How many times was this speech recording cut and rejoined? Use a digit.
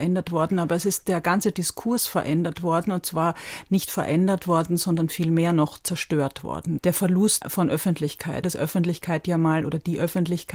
2